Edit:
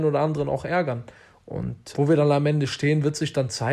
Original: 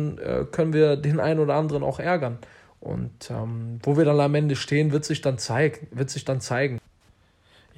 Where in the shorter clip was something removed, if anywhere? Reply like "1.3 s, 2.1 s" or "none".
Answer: 1.9 s